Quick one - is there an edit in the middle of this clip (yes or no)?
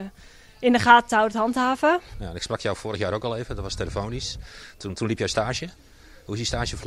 yes